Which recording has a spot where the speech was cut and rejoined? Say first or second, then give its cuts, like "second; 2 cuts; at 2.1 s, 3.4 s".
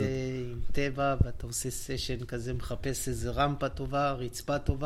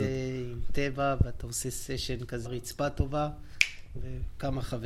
second; 2 cuts; at 2.4 s, 3.9 s